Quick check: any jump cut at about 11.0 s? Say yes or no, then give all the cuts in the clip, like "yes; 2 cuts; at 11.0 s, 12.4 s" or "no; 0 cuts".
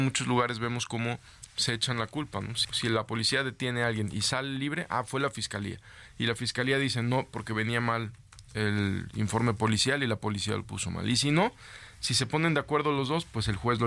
no; 1 cut; at 2.6 s